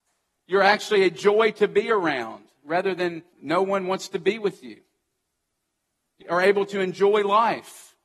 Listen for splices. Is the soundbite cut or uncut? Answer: cut